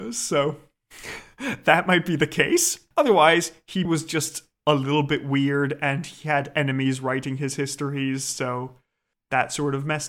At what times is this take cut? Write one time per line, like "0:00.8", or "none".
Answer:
0:03.8